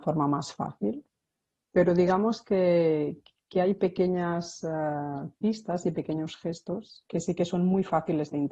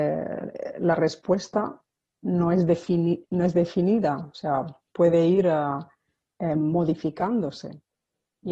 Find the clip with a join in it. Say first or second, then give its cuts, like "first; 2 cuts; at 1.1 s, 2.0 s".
first; 1 cut; at 1.6 s